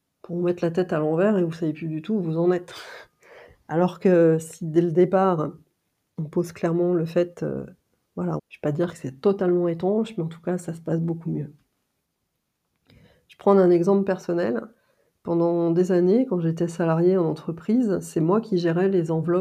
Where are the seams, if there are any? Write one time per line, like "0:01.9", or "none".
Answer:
0:08.4